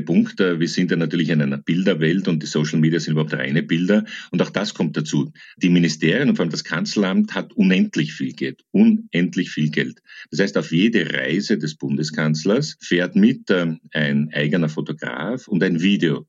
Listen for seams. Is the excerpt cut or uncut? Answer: uncut